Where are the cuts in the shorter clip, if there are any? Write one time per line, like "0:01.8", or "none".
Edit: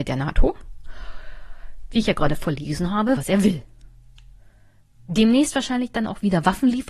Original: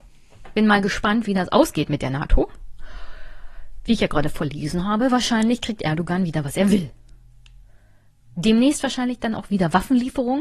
0:03.2